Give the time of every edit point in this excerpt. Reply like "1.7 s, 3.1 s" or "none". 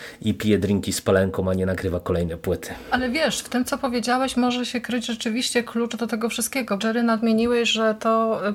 6.8 s